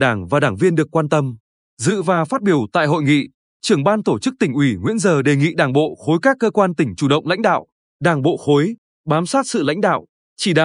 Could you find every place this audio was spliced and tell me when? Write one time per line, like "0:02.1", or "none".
0:01.6
0:07.8